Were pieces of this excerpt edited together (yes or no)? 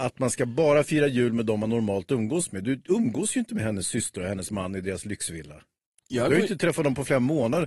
no